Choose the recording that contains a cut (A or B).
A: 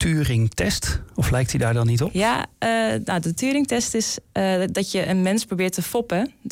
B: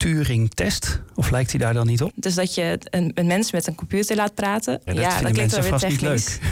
B